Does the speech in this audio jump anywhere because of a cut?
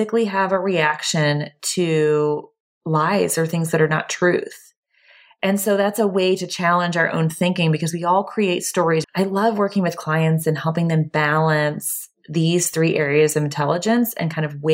yes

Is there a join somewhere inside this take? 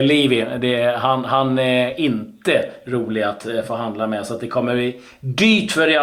no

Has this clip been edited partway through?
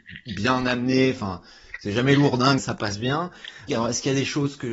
yes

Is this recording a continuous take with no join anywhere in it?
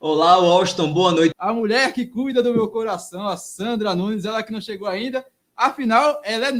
no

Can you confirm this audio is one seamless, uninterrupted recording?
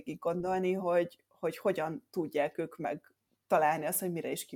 yes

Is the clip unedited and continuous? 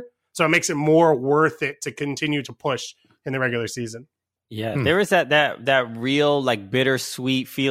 yes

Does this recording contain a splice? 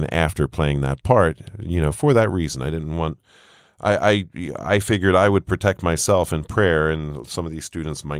no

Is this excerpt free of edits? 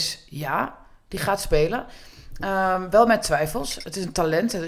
yes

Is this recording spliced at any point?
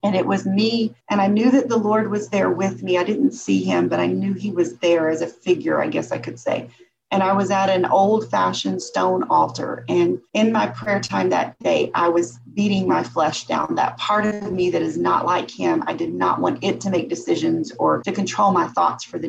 no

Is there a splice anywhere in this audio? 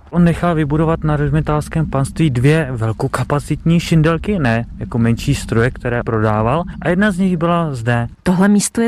no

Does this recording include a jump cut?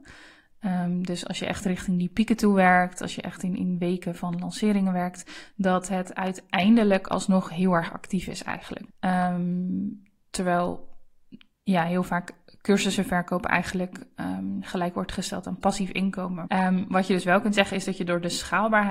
yes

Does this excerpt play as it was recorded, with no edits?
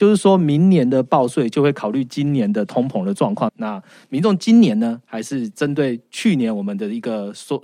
no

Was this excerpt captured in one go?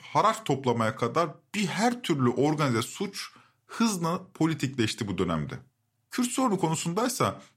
yes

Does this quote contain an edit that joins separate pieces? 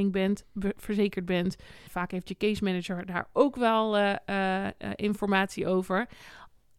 yes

